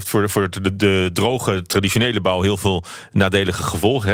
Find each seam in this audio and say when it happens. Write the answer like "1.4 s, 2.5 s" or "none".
none